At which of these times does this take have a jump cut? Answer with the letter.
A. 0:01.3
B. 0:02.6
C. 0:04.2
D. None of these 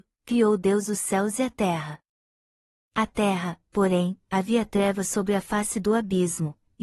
C